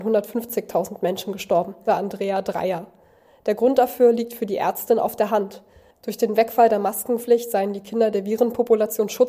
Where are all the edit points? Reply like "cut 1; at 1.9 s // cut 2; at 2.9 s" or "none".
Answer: cut 1; at 1.9 s